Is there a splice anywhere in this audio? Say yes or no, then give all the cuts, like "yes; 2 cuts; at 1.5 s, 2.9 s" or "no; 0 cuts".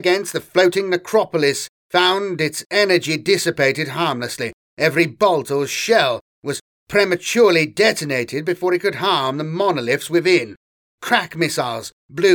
no; 0 cuts